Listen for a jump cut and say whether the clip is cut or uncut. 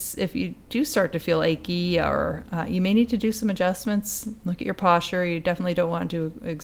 uncut